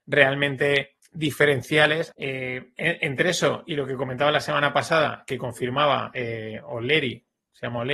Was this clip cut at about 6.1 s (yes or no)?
no